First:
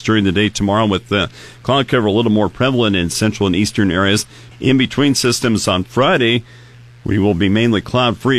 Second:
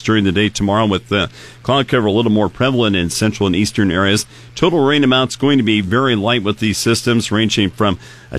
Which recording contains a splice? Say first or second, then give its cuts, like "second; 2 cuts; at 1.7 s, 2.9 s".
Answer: first; 1 cut; at 4.5 s